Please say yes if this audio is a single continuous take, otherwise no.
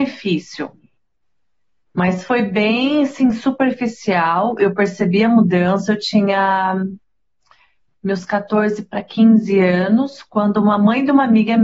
yes